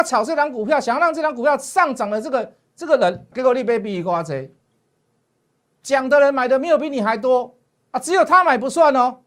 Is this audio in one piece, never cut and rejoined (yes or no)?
no